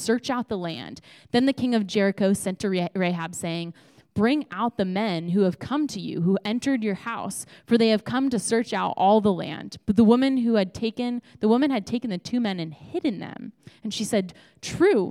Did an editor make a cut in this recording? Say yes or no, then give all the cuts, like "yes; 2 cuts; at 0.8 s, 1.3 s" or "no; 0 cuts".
no; 0 cuts